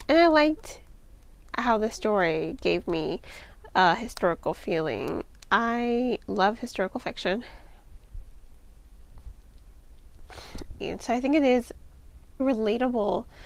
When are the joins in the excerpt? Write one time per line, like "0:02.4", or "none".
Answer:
0:10.8
0:12.4